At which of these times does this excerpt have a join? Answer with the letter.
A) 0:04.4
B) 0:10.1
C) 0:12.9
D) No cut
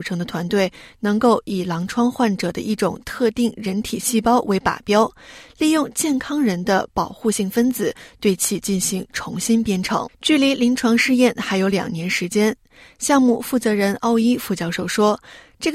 B